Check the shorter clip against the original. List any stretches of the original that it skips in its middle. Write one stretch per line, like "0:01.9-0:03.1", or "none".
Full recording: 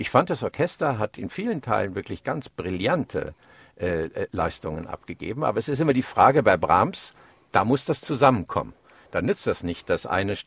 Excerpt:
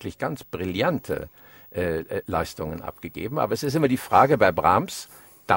none